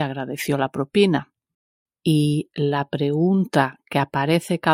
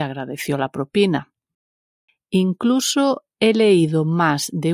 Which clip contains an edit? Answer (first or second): first